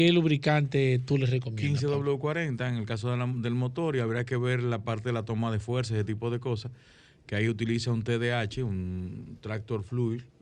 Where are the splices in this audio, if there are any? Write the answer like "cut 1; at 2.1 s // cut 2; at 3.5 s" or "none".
none